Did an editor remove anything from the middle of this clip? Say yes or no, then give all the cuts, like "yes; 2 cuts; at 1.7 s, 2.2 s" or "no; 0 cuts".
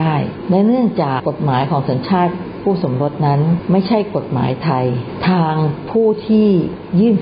yes; 1 cut; at 1.2 s